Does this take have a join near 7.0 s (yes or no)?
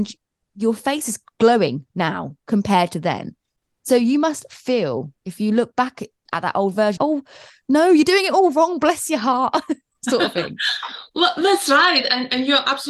yes